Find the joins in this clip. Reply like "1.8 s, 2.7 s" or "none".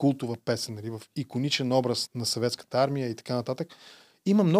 2.1 s

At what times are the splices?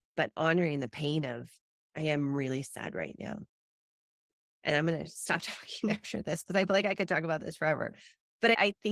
4.5 s

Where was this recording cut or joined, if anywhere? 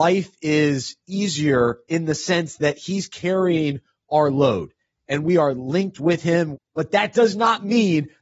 6.5 s

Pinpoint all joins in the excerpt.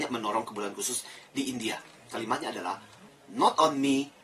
3.1 s

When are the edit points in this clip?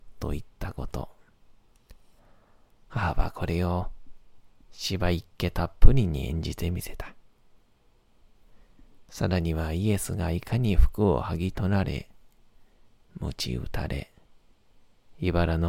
none

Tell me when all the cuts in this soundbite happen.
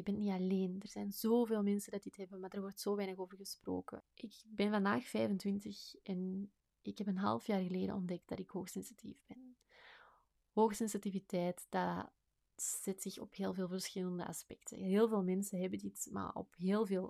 4.0 s

